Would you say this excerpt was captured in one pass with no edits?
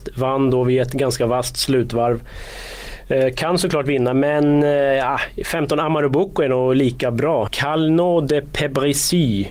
no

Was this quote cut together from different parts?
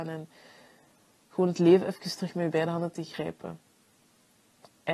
no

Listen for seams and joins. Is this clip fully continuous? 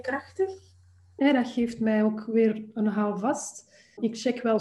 no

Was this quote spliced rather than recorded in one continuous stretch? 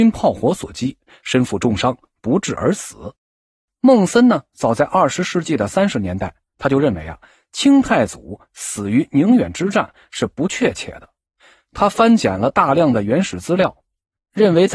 yes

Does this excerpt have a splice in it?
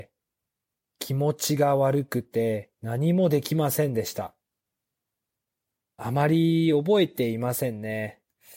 yes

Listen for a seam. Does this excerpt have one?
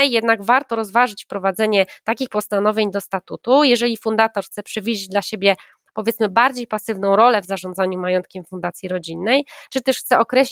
no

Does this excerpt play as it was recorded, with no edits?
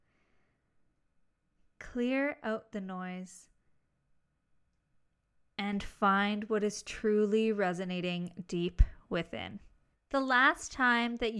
no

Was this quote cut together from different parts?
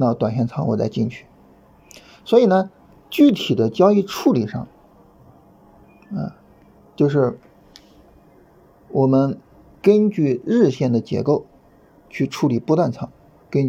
no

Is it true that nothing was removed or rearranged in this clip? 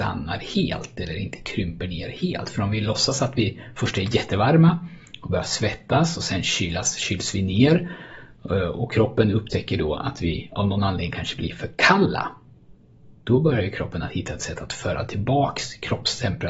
no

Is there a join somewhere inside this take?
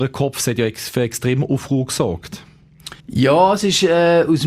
yes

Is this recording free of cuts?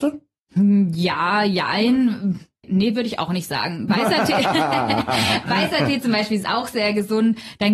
yes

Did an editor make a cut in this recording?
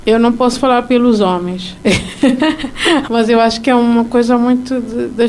yes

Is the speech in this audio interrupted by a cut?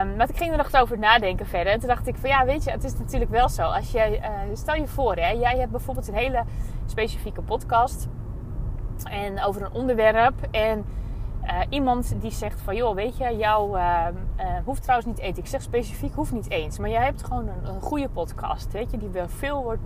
no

